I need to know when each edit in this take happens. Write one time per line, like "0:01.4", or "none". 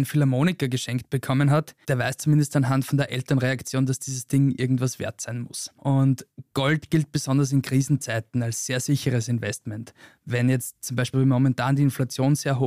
0:11.1